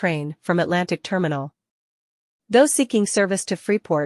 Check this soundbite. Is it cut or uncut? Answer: uncut